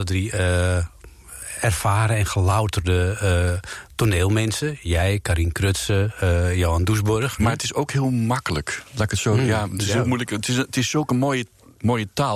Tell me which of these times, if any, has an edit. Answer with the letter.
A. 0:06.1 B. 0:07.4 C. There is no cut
B